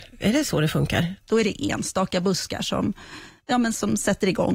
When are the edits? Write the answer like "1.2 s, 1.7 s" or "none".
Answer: 1.2 s, 3.5 s

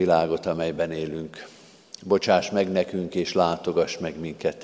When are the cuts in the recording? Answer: none

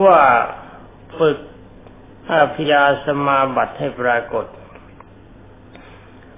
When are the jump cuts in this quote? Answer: 2.6 s

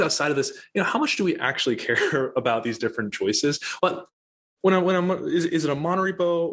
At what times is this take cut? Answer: 3.8 s

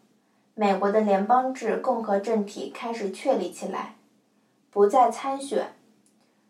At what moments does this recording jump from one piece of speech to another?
4.6 s

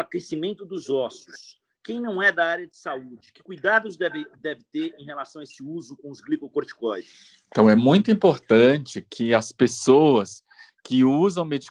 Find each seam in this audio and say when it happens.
none

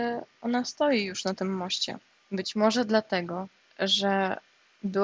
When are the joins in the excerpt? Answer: 2.2 s

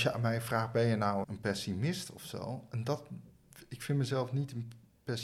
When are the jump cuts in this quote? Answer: 1.2 s

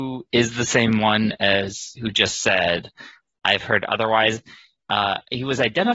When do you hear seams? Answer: none

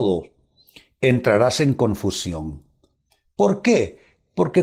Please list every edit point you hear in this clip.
none

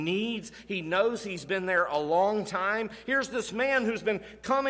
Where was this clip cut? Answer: 3.0 s

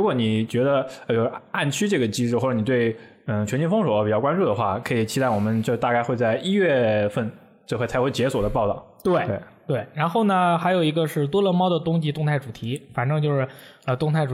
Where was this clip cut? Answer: none

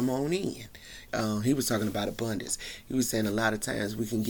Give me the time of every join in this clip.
1.1 s

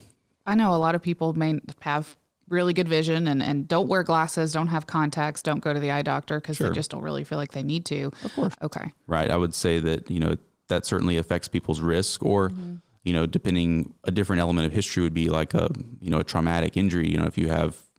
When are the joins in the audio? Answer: 8.5 s

